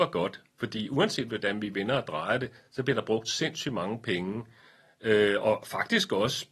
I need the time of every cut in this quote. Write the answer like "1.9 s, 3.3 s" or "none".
none